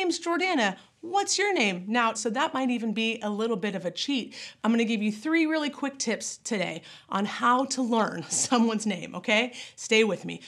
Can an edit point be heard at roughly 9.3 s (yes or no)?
no